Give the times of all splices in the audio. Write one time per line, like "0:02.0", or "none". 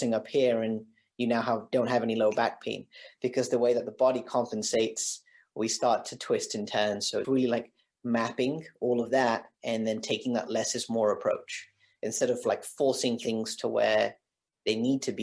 0:07.2